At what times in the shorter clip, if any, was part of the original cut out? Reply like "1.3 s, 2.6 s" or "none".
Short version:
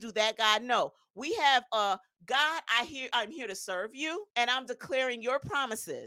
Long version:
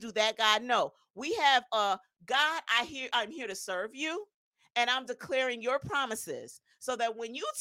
4.3 s